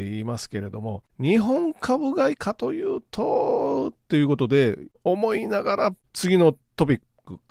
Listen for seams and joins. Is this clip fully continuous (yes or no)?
no